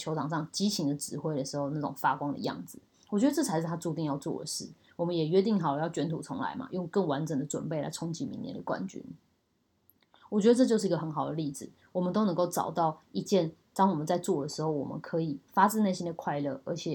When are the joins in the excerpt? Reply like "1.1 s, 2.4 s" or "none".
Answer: none